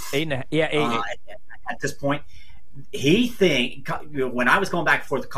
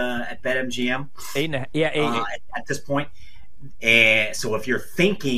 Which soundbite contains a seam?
second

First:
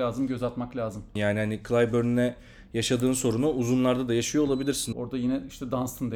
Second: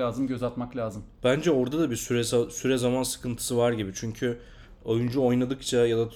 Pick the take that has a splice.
first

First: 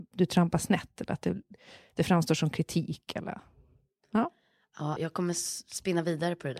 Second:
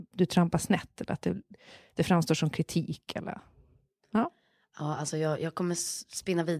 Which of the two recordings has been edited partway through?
first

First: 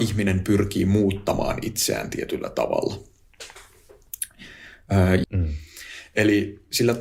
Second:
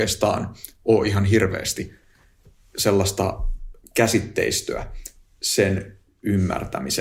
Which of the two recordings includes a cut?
first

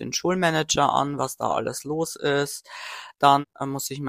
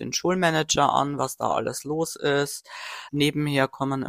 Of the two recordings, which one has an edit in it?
second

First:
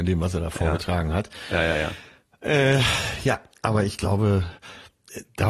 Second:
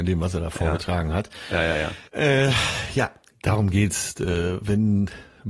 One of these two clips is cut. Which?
second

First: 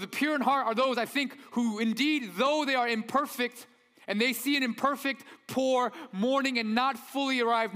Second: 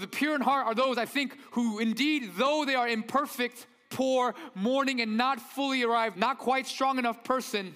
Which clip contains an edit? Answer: second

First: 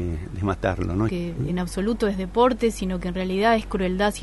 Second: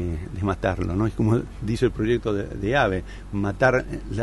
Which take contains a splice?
first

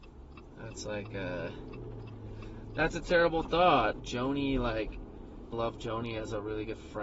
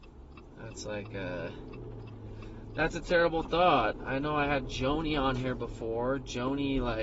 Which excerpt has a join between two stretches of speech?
first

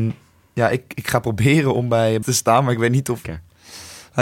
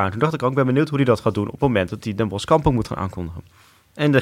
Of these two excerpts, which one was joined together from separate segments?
first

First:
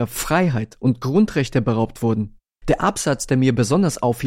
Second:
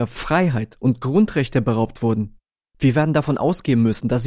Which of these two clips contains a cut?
first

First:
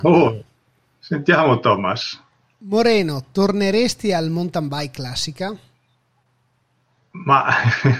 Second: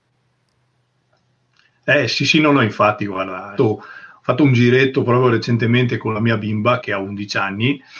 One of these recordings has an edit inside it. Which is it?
second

